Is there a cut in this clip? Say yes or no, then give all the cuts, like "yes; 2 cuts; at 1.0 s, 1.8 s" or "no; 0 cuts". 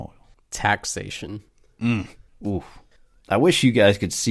yes; 1 cut; at 2.4 s